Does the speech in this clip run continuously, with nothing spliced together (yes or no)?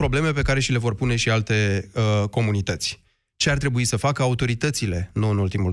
yes